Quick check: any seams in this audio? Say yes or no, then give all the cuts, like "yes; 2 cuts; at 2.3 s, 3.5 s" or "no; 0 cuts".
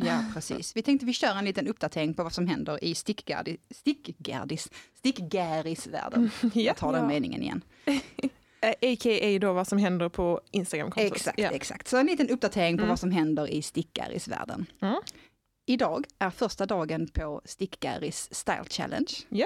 no; 0 cuts